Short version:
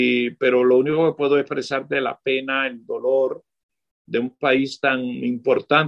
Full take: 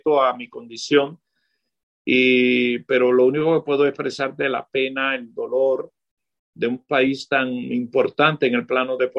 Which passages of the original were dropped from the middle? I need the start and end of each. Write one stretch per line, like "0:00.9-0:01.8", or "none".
none